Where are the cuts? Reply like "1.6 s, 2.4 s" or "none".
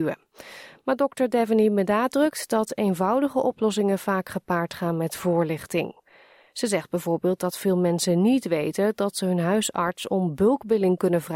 none